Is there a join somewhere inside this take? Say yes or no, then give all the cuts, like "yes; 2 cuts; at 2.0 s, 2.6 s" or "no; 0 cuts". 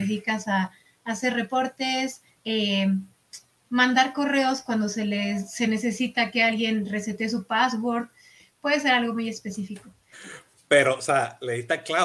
yes; 2 cuts; at 2.4 s, 10.1 s